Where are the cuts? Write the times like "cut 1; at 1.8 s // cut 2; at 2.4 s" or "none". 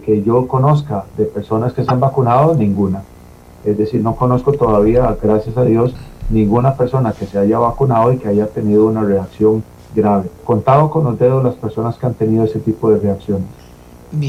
cut 1; at 10.4 s